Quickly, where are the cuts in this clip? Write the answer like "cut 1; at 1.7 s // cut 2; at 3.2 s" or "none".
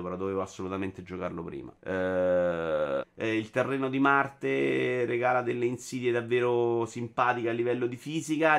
cut 1; at 1.8 s // cut 2; at 3.0 s